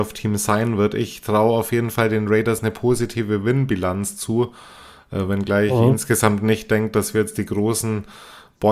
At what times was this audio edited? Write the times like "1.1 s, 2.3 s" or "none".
none